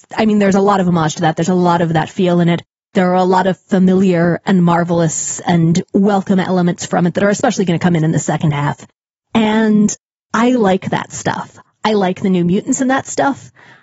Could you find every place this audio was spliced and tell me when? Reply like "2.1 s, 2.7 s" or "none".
none